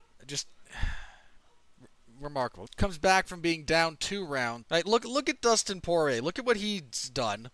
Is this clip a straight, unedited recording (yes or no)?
no